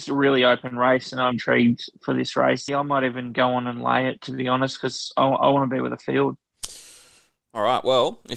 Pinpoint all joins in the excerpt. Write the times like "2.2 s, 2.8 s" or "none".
1.3 s, 2.7 s